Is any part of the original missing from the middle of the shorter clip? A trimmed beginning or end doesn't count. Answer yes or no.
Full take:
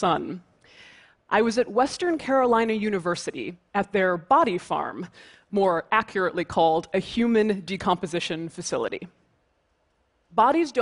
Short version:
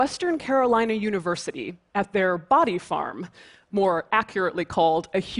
no